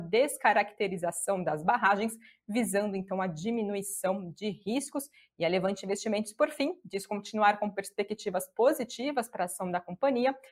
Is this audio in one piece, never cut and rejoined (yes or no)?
yes